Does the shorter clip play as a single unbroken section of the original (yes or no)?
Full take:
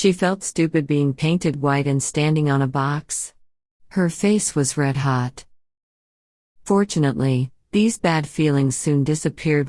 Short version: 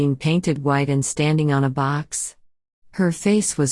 yes